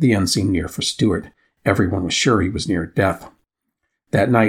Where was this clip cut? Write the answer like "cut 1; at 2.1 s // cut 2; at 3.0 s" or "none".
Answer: cut 1; at 1.4 s